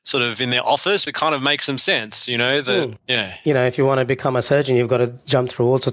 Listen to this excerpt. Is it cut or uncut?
cut